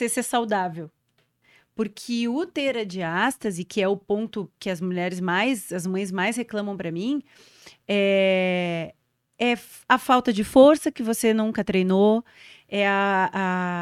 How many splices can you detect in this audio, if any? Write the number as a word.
zero